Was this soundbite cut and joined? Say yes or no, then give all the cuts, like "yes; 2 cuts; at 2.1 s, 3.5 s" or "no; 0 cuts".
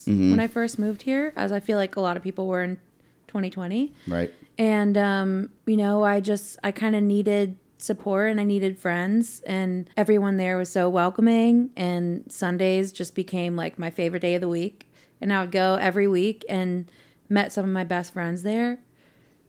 yes; 2 cuts; at 5.6 s, 9.9 s